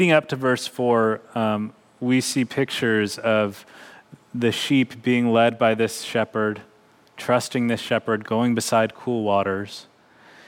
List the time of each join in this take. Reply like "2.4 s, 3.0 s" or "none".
8.2 s

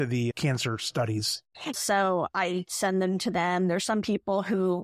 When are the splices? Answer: 1.7 s

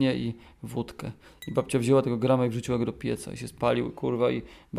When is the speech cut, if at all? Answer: none

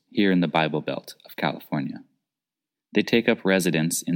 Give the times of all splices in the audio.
none

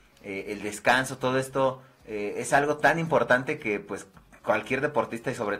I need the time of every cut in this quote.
none

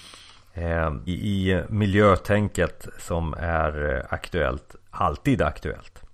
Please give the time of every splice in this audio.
1.1 s

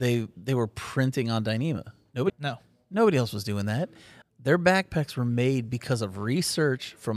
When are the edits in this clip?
2.3 s, 4.2 s

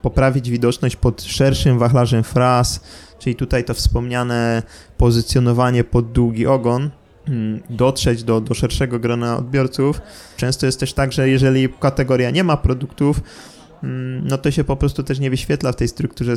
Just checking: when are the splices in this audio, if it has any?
10.4 s

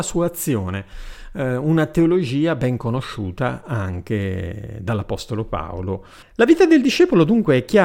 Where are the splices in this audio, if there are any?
6.2 s

